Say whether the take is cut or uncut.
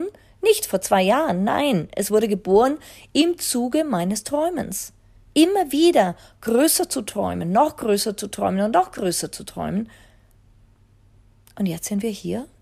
uncut